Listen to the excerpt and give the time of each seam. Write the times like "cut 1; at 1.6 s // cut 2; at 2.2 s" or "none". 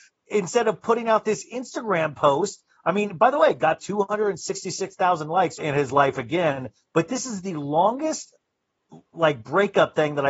cut 1; at 5.6 s

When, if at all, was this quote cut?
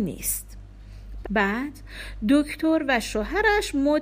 cut 1; at 1.2 s

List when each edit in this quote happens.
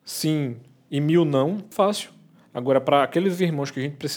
cut 1; at 1.7 s

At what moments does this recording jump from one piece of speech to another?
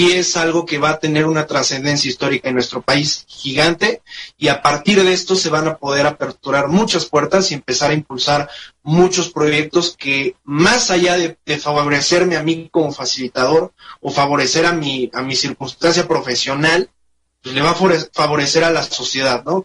none

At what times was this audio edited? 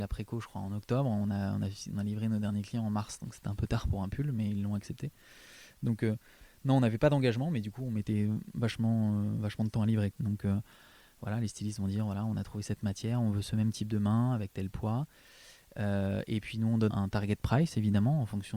cut 1; at 10.1 s // cut 2; at 16.9 s

